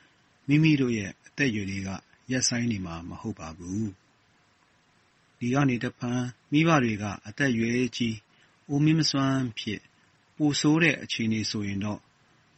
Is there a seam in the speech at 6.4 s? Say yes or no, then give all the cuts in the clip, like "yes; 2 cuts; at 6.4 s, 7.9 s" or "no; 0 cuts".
yes; 1 cut; at 6.4 s